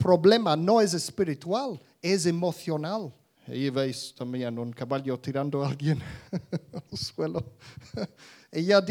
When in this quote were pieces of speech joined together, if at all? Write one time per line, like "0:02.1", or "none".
0:03.3
0:06.3